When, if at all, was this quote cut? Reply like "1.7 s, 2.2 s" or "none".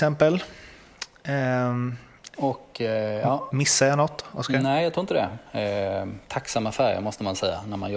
2.3 s